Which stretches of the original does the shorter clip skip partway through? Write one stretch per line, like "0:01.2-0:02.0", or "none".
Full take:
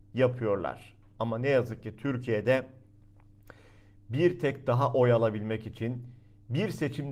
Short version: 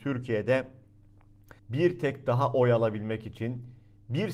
0:03.6-0:04.0